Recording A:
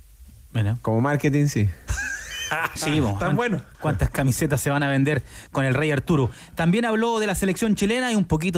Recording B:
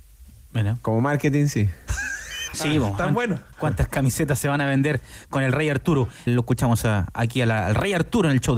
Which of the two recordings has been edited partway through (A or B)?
B